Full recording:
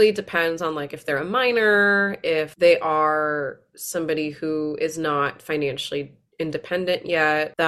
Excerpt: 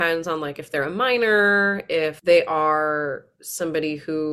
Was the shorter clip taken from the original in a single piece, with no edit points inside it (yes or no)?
yes